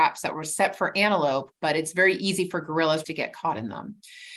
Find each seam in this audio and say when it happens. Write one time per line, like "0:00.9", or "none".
0:01.6
0:03.0